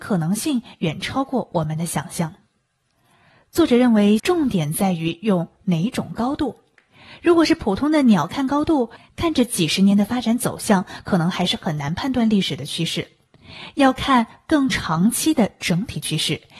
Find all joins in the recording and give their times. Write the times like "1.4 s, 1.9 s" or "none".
4.2 s